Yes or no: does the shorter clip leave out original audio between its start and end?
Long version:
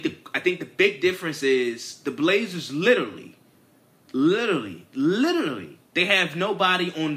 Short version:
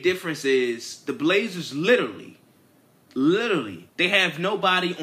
yes